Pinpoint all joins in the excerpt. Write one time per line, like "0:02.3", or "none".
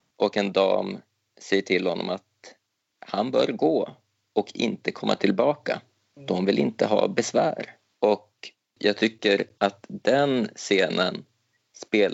none